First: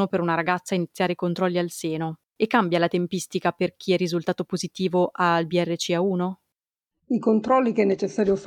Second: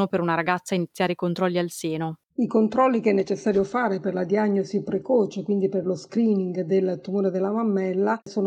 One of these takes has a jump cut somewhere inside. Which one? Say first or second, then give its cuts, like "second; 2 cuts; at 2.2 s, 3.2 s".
second; 1 cut; at 2.3 s